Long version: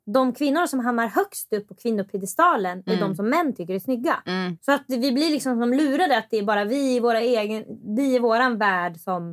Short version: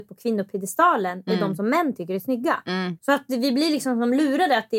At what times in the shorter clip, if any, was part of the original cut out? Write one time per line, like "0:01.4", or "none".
none